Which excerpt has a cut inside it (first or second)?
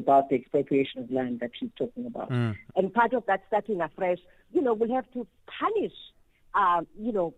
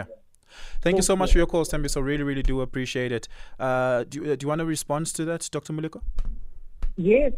first